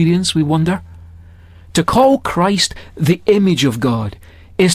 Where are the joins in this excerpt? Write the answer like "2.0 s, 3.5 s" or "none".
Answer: none